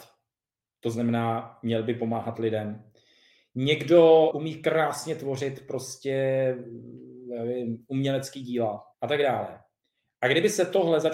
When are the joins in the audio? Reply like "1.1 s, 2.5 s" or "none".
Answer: 4.3 s, 8.9 s

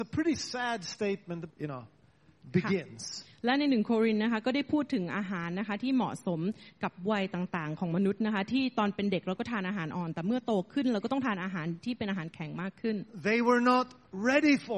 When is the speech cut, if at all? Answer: 1.5 s

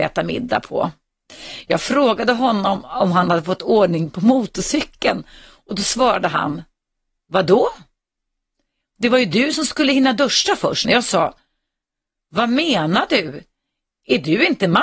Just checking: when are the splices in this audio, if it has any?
10.8 s

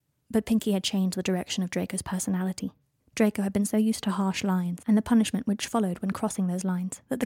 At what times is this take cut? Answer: 3.0 s

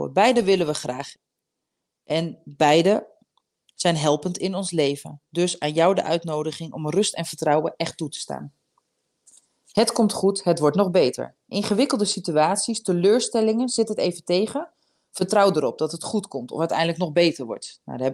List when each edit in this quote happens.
none

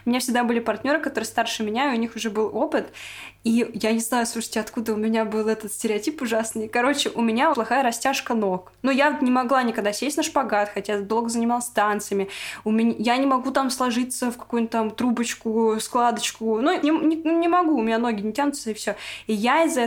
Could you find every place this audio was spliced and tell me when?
7.5 s, 16.8 s

